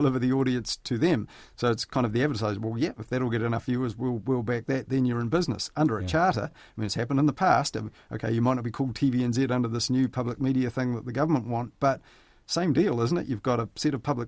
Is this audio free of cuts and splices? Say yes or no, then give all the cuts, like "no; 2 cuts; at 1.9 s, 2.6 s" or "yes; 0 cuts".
yes; 0 cuts